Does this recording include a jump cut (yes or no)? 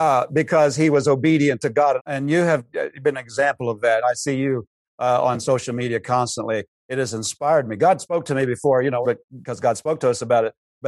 yes